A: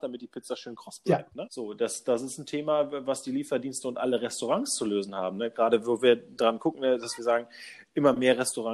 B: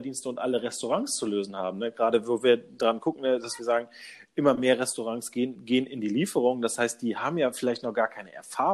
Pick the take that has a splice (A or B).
A